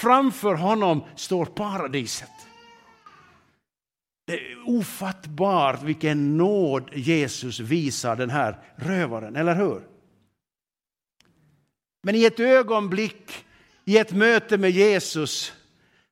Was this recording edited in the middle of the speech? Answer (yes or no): yes